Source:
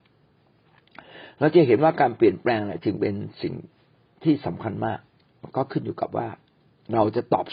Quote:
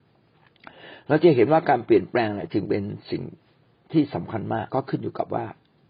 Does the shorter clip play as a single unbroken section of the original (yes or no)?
no